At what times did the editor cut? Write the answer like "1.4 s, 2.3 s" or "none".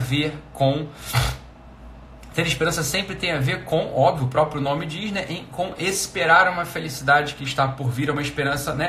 none